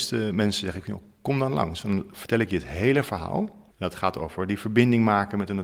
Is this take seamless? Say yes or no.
no